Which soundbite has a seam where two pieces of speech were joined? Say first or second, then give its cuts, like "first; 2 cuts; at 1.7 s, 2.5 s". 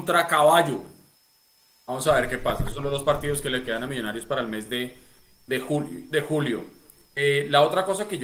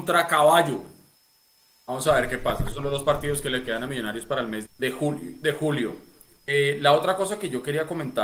second; 1 cut; at 4.7 s